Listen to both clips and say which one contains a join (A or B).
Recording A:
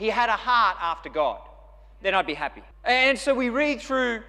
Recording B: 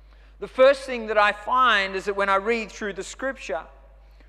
A